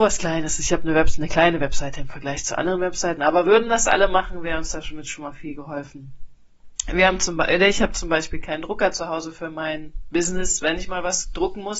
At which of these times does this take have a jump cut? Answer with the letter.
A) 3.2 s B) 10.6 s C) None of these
C